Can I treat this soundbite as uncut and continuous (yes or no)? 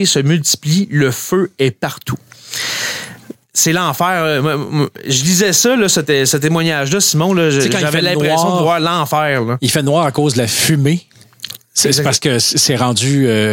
yes